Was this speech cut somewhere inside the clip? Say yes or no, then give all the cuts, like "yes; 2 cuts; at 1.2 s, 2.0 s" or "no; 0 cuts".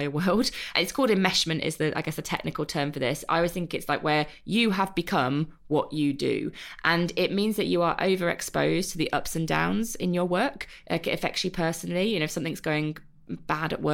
no; 0 cuts